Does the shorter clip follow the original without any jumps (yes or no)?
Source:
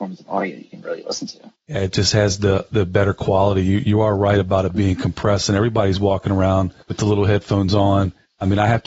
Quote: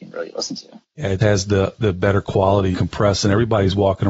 no